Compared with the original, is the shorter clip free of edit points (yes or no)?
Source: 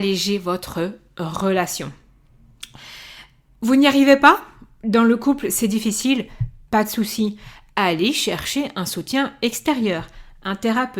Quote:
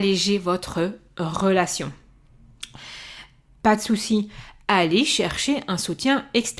no